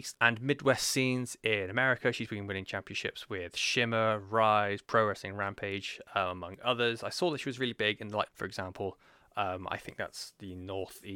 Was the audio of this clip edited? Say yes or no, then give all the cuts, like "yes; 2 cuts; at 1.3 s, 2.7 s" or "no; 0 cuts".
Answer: yes; 1 cut; at 8.3 s